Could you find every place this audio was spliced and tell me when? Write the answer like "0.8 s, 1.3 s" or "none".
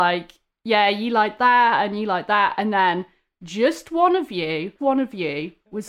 4.8 s